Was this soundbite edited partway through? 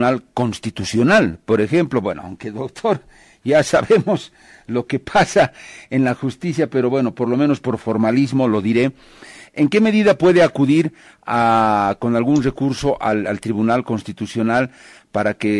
no; 0 cuts

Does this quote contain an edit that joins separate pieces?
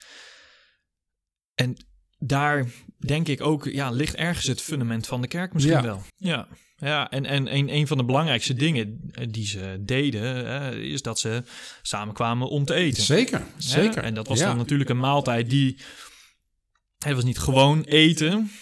yes; 1 cut; at 6.1 s

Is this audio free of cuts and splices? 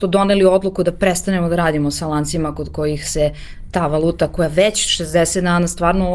yes; 0 cuts

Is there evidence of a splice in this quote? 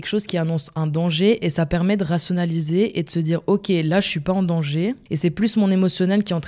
no; 0 cuts

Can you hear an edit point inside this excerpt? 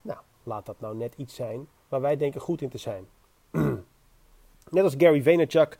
no; 0 cuts

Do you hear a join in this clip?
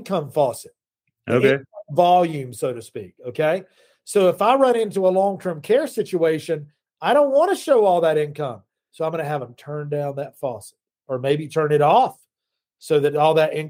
no; 0 cuts

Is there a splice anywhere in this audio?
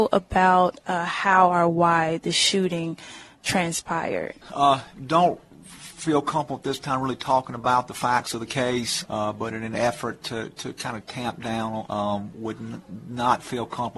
yes; 3 cuts; at 4.4 s, 9.0 s, 11.9 s

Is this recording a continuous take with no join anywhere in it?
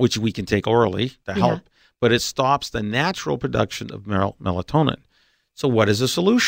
no; 1 cut; at 1.2 s

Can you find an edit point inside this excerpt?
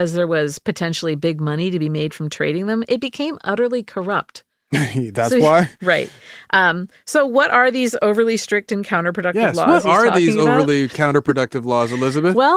no; 0 cuts

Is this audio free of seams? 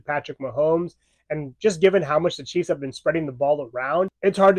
yes; 0 cuts

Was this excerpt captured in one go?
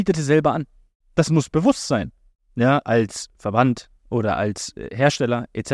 no; 2 cuts; at 1.0 s, 2.3 s

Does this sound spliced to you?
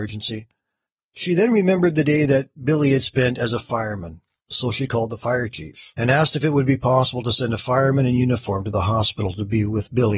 yes; 1 cut; at 1.1 s

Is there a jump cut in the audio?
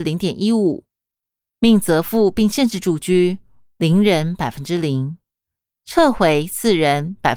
no; 0 cuts

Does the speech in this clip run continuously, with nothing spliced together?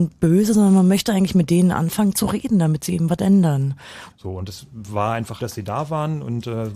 no; 2 cuts; at 4.1 s, 5.4 s

